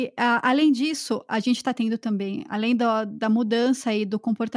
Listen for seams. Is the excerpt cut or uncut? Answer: uncut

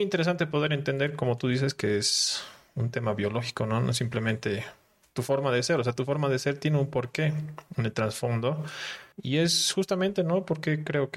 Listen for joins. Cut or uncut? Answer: cut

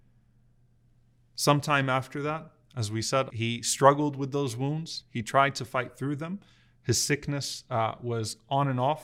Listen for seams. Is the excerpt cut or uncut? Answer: cut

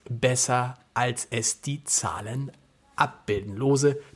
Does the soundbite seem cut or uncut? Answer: uncut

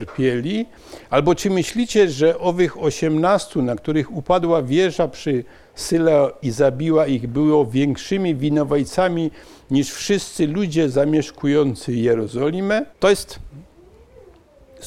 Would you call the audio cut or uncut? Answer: cut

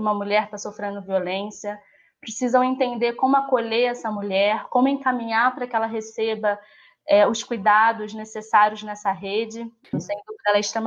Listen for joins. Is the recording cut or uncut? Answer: cut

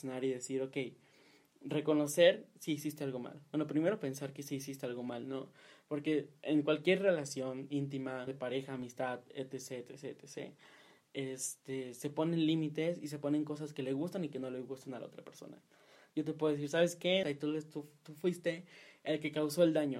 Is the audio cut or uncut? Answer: cut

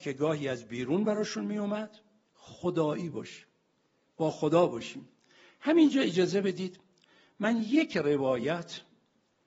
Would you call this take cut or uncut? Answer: cut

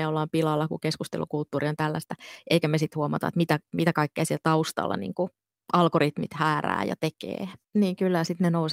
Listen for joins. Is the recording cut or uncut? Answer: cut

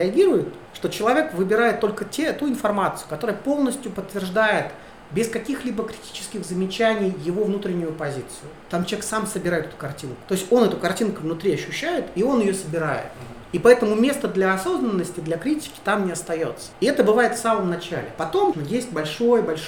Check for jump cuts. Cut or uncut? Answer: cut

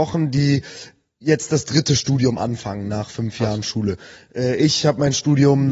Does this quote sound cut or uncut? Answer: uncut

